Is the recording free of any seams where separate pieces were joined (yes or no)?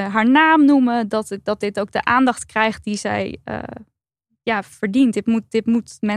yes